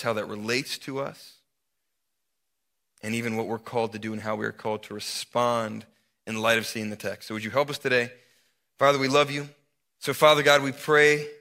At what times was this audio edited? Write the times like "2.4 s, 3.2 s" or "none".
9.8 s